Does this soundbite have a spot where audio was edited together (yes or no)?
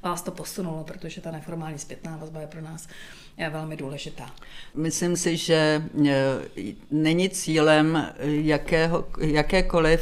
yes